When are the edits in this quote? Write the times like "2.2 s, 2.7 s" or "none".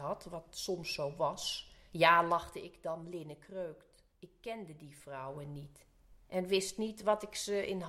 4.1 s